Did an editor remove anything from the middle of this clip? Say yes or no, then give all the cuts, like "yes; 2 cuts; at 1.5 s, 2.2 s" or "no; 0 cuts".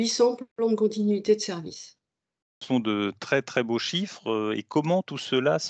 no; 0 cuts